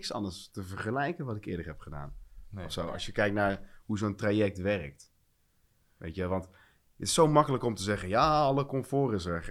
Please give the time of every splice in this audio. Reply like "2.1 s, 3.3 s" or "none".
none